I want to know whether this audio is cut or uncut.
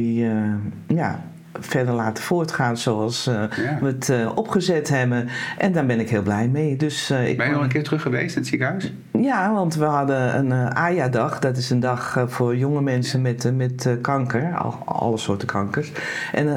uncut